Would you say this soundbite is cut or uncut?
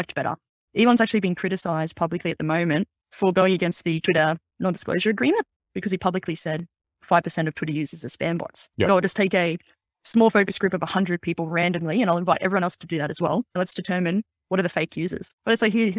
uncut